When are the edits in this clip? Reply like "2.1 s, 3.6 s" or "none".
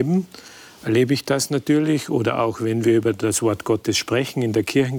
none